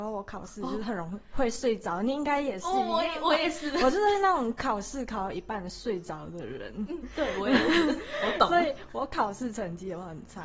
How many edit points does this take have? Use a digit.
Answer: 0